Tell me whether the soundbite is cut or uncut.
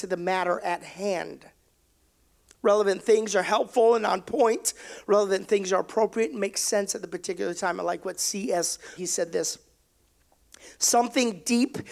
cut